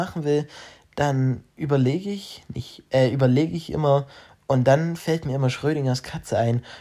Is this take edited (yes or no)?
no